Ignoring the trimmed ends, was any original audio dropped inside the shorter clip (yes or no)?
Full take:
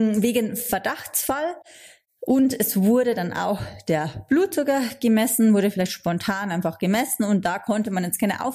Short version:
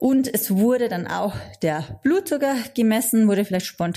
no